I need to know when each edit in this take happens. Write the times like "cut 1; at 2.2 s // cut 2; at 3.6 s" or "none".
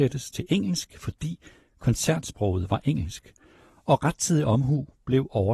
none